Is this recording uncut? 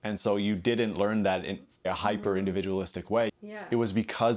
no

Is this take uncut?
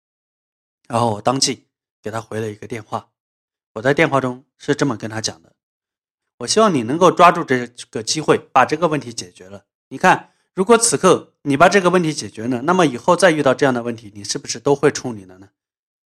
no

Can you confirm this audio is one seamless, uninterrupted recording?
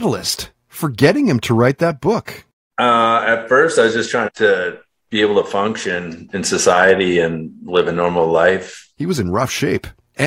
no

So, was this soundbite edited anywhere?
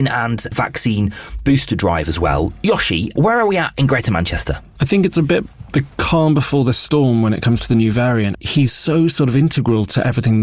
yes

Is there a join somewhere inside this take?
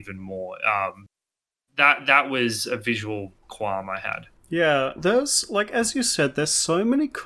no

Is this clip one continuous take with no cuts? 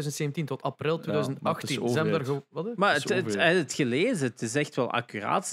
yes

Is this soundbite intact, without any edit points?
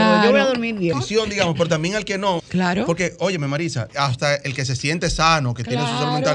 no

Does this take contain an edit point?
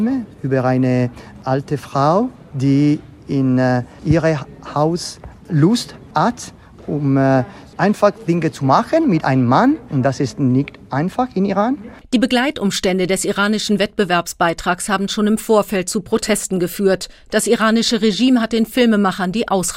no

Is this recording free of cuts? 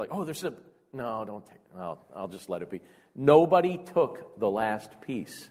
yes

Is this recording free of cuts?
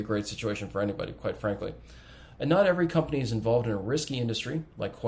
no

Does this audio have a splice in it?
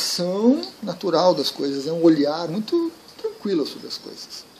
yes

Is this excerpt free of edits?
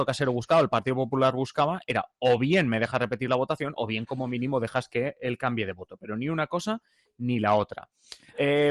yes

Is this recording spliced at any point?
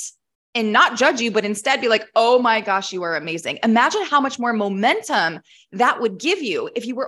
no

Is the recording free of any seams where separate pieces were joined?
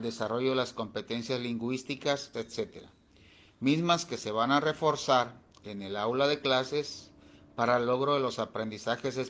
no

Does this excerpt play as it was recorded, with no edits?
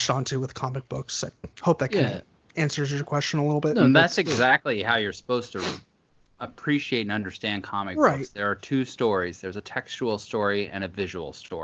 yes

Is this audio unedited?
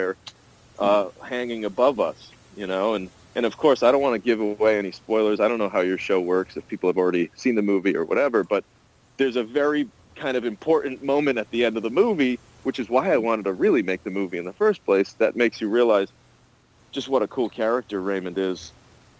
yes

